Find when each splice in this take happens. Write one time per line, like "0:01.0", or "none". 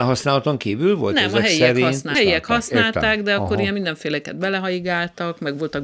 0:02.1